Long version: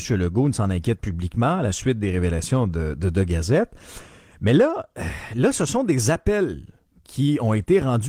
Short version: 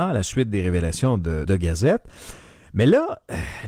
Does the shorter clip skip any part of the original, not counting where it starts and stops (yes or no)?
yes